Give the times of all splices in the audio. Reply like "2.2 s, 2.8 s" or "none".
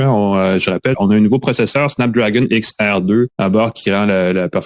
0.9 s, 3.3 s